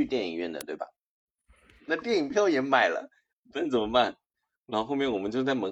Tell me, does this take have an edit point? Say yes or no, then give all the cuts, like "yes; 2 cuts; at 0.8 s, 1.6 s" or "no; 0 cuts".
yes; 1 cut; at 1.9 s